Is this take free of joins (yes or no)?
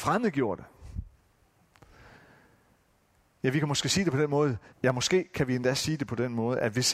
no